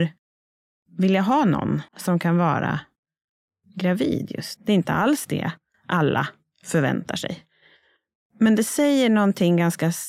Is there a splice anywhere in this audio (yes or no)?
yes